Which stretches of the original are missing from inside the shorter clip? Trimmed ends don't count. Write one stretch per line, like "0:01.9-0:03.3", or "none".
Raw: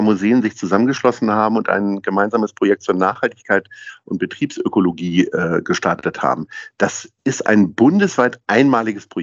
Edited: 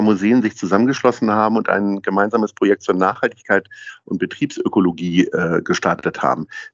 none